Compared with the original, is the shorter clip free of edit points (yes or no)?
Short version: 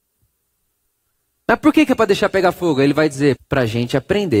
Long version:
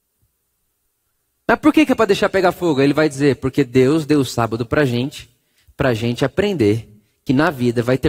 no